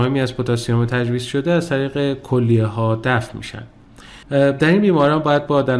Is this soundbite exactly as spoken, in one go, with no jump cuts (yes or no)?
no